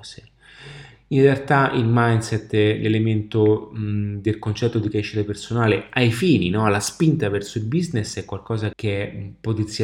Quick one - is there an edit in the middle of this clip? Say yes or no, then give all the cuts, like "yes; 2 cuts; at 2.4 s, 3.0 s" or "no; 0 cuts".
yes; 1 cut; at 8.7 s